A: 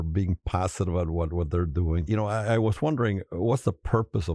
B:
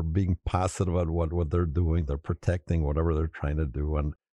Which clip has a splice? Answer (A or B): A